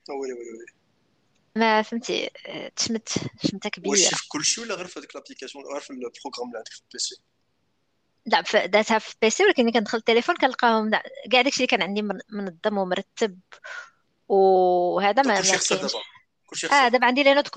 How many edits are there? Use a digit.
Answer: 1